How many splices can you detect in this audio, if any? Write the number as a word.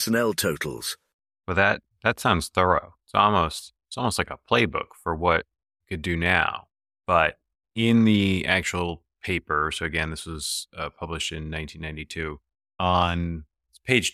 zero